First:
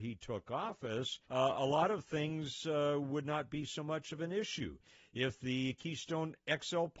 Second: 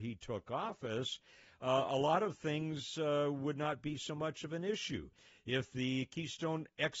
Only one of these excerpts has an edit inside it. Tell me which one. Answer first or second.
first